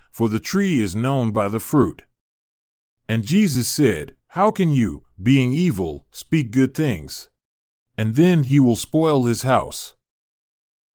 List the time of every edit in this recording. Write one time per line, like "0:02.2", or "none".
0:04.2
0:07.8

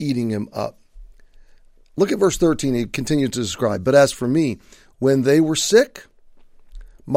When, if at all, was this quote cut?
none

